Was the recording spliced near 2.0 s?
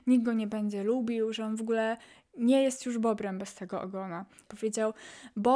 no; 1 cut; at 4.5 s

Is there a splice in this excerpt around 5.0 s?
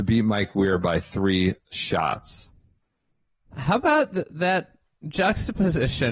no; 1 cut; at 3.5 s

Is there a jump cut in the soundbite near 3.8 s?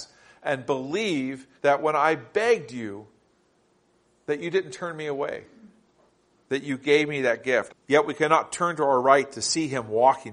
no; 2 cuts; at 1.6 s, 7.7 s

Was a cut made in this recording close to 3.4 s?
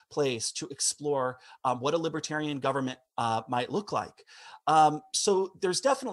no; 0 cuts

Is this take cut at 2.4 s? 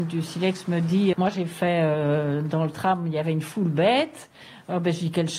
no; 1 cut; at 1.1 s

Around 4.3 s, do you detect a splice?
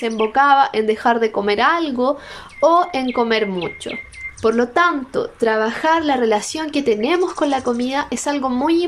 yes; 1 cut; at 4.3 s

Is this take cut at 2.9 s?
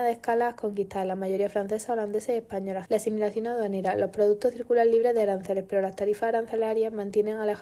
yes; 1 cut; at 2.9 s

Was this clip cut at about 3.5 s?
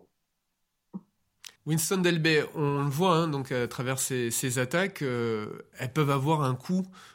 no; 1 cut; at 1.6 s

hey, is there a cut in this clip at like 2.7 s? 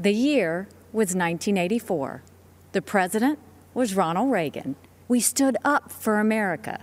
no; 1 cut; at 5.0 s

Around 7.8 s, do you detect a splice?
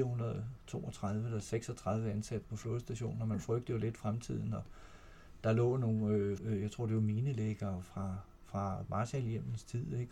no; 1 cut; at 6.4 s

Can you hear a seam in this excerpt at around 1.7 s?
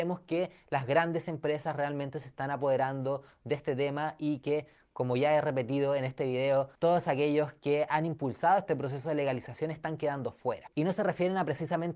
no; 1 cut; at 10.7 s

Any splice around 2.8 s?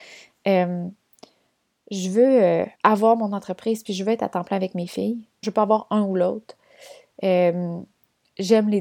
yes; 2 cuts; at 2.8 s, 5.4 s

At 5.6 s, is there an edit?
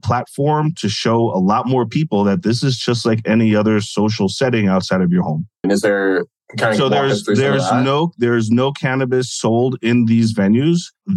yes; 1 cut; at 5.6 s

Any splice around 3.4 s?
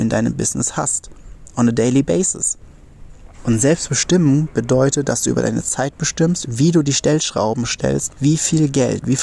yes; 3 cuts; at 3.4 s, 6.4 s, 8.2 s

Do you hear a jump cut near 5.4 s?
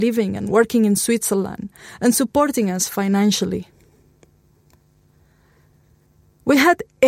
no; 0 cuts

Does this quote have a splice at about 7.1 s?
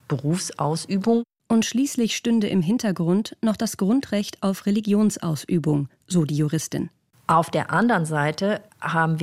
yes; 1 cut; at 7.1 s

